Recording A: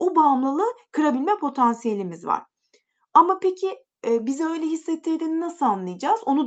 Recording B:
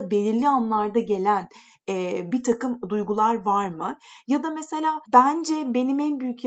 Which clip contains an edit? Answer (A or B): B